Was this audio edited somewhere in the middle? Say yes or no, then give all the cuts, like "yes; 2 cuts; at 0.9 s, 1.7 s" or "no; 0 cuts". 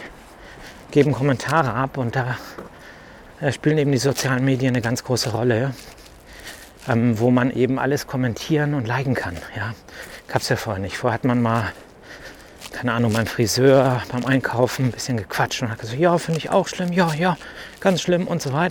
no; 0 cuts